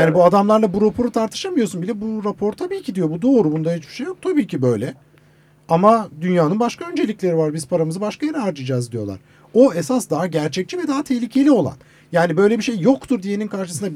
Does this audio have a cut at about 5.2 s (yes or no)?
no